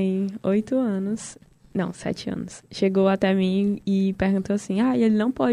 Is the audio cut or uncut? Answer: uncut